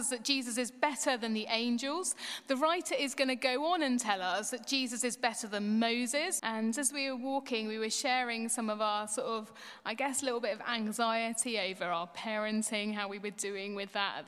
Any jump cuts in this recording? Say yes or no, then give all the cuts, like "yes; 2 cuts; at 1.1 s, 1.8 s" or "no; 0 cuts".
yes; 1 cut; at 6.4 s